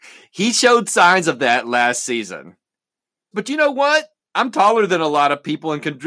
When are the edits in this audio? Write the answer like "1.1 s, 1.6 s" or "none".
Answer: 3.3 s